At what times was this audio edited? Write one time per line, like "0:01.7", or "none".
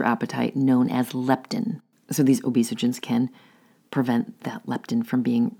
none